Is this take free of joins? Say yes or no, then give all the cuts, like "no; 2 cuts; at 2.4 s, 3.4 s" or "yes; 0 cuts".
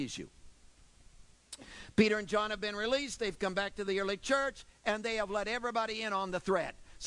yes; 0 cuts